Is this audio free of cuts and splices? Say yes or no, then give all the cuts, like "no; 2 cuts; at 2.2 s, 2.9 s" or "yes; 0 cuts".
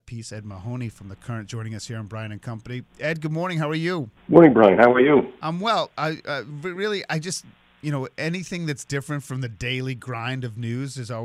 no; 1 cut; at 4.2 s